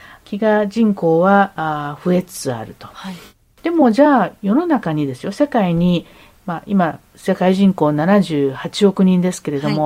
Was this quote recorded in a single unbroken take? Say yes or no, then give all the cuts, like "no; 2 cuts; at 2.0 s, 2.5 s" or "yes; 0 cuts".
yes; 0 cuts